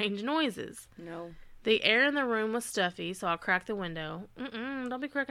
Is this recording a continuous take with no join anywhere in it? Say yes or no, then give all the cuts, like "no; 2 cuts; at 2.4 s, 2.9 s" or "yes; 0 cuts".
yes; 0 cuts